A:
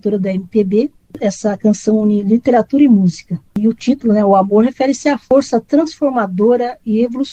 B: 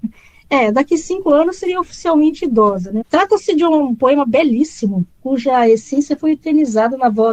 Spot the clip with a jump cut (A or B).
B